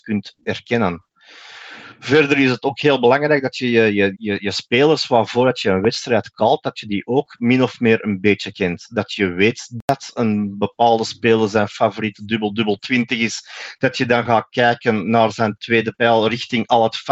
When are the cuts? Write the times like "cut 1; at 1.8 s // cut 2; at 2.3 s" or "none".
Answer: cut 1; at 4.1 s